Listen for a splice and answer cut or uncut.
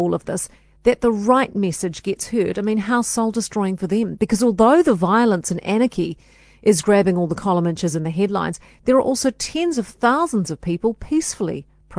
uncut